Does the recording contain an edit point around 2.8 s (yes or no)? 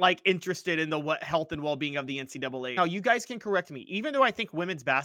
yes